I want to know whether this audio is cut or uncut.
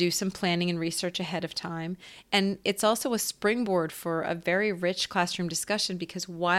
uncut